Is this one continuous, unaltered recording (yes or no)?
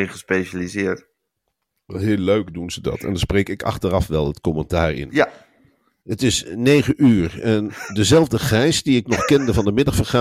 yes